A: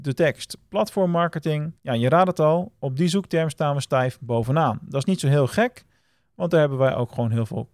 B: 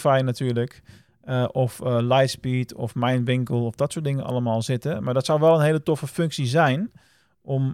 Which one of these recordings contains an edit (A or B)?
A